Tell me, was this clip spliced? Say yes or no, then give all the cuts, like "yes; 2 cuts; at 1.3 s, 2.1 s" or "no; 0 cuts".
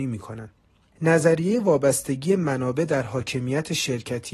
yes; 1 cut; at 0.9 s